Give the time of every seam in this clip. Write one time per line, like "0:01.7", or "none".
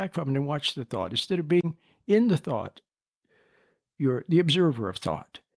none